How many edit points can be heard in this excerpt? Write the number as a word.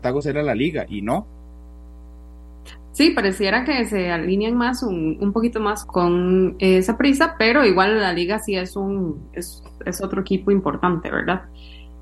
one